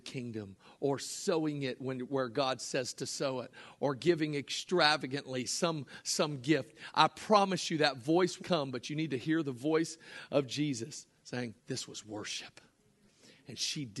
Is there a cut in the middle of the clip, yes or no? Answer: yes